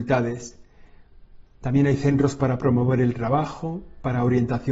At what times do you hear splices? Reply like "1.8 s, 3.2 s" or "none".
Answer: 1.6 s